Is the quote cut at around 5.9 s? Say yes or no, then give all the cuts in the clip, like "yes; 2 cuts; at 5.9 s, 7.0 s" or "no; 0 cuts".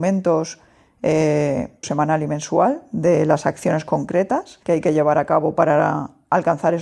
no; 2 cuts; at 1.8 s, 4.6 s